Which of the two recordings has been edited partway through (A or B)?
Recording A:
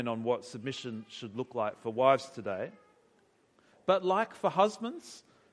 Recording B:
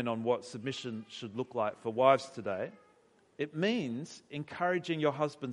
B